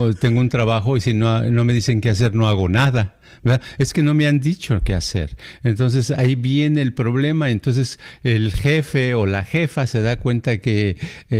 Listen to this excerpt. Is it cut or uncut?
uncut